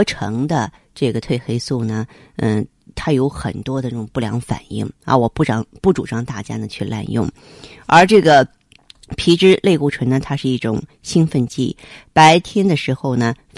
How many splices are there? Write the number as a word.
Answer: zero